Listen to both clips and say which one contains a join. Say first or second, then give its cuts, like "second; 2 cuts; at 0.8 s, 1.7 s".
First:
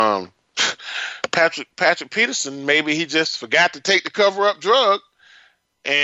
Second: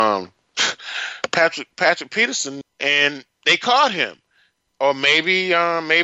second; 1 cut; at 2.6 s